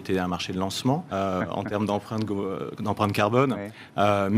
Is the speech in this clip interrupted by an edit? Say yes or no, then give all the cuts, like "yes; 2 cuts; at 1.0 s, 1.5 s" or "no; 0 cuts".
yes; 1 cut; at 1.1 s